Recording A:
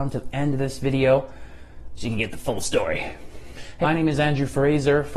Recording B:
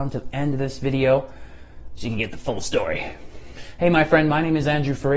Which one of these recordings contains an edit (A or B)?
A